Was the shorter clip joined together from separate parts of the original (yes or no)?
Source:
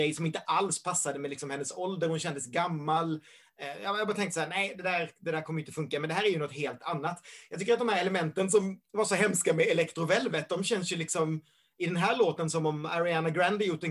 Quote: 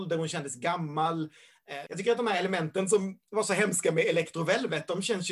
yes